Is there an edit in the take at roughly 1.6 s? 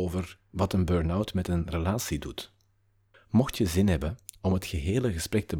no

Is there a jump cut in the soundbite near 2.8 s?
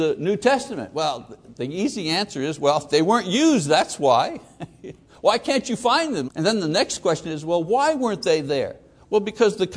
no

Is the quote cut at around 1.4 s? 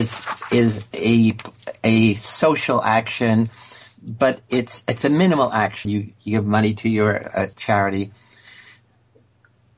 no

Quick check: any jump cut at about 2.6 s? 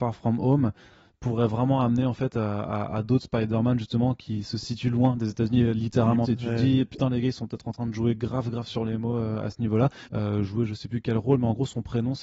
no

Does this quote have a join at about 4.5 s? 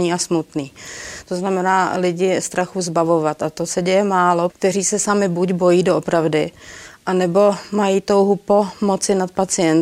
yes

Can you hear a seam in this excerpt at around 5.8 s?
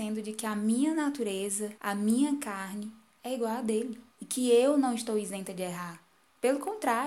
no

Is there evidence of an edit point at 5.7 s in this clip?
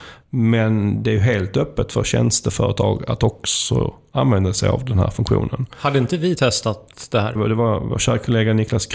no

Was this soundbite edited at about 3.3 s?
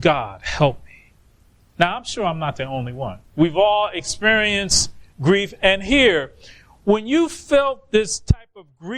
yes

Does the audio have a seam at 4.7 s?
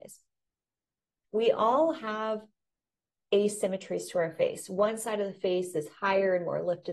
no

